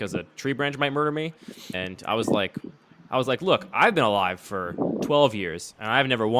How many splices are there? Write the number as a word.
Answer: one